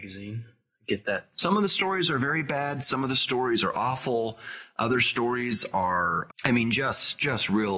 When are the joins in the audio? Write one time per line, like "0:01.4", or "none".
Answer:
0:01.3
0:06.3